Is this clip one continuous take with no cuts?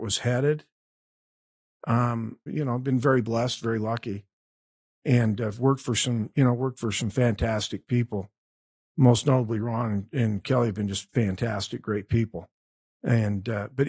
no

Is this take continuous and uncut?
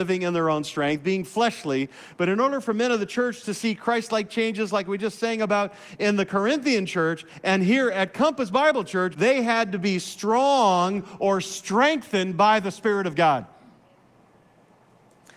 no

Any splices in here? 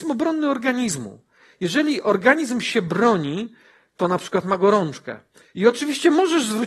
no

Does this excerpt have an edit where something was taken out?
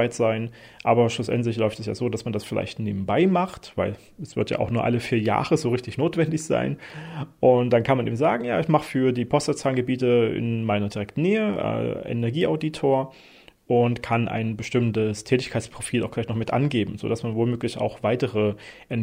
no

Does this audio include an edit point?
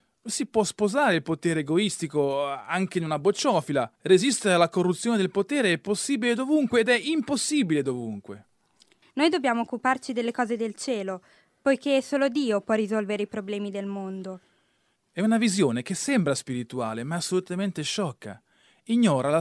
yes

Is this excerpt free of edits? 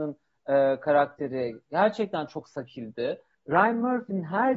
no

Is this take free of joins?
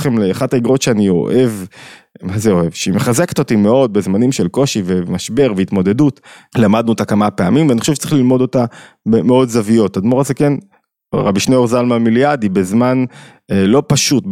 no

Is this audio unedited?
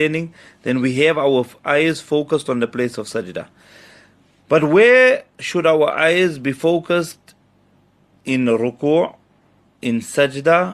yes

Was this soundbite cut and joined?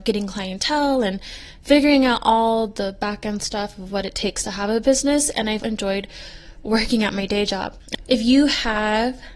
yes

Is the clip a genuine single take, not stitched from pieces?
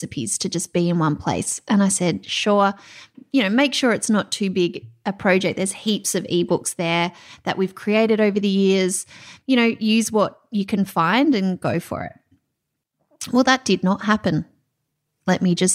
yes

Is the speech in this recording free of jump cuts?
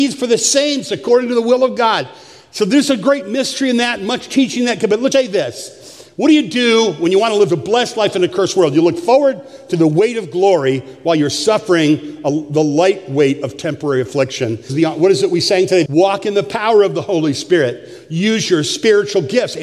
no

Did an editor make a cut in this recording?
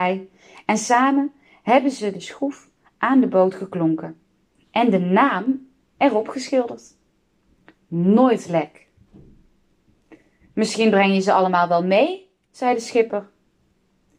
no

